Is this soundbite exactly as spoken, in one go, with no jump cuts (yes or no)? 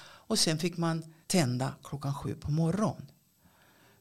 no